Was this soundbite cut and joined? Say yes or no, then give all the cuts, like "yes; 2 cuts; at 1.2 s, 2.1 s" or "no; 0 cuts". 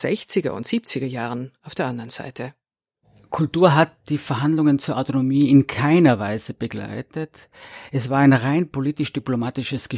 no; 0 cuts